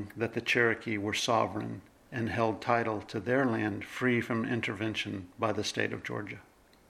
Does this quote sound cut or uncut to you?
uncut